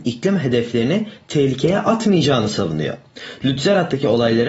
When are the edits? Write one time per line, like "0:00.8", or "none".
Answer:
none